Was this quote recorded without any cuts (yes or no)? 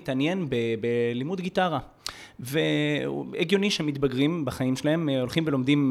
yes